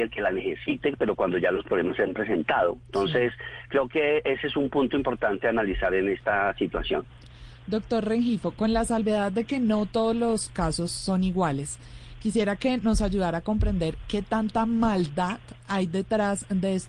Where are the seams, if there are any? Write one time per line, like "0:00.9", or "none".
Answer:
none